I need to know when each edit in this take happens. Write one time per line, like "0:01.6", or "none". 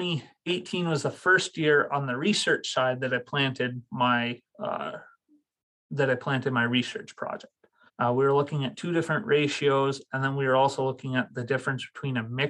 0:07.9